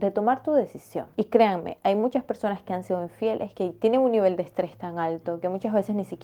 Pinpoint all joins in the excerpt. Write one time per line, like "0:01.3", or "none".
0:01.1
0:03.5